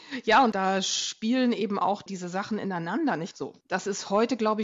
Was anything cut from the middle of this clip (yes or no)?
yes